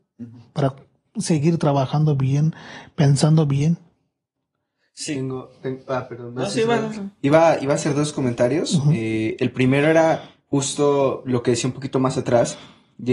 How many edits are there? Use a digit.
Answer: 0